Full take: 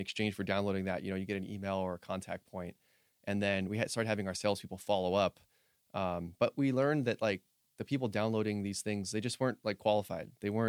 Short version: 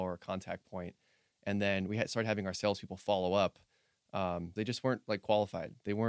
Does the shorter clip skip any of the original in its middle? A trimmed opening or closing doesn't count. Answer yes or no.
yes